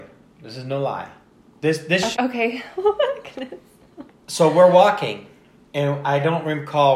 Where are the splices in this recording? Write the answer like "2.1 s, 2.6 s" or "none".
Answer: 2.1 s